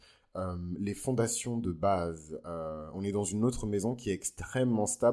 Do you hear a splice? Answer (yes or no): no